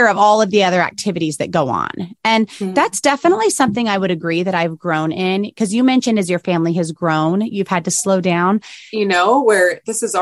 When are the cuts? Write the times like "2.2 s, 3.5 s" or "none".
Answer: 8.9 s